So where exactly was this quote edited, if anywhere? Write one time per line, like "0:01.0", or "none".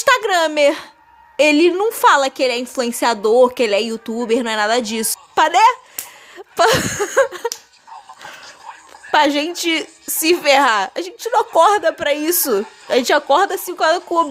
0:05.1